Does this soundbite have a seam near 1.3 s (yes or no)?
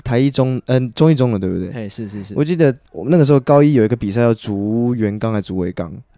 no